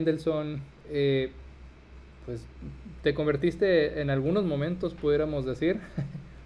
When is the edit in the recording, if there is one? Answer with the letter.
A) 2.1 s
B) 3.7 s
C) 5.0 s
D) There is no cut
D